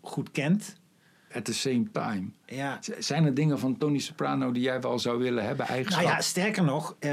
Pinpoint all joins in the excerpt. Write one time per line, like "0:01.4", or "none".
0:01.3